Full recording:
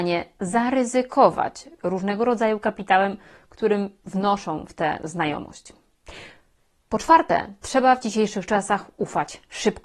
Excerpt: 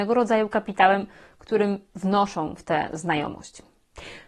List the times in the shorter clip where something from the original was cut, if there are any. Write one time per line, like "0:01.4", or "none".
none